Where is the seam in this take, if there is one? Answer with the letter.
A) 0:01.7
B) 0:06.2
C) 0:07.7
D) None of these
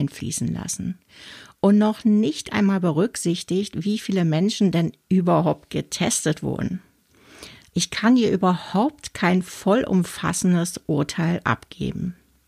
C